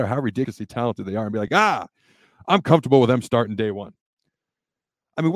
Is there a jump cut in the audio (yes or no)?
no